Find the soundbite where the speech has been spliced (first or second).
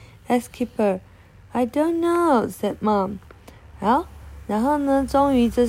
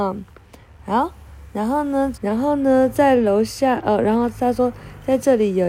second